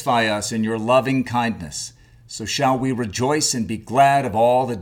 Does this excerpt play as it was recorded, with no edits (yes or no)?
yes